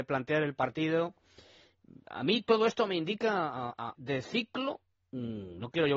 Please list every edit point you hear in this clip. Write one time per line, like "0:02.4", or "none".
0:04.0